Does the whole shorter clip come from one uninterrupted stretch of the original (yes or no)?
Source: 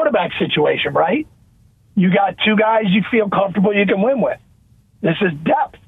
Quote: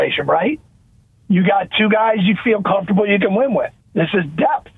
no